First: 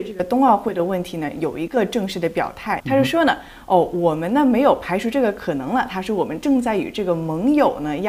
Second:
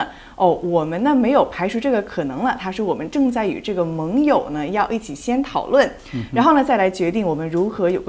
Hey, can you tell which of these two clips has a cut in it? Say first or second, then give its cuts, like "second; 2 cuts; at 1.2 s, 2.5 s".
first; 1 cut; at 2.8 s